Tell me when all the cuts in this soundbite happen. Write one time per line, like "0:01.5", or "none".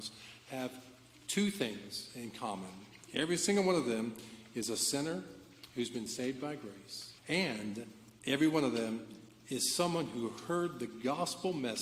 0:07.2